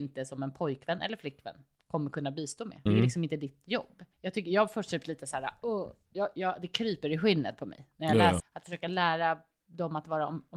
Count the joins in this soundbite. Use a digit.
3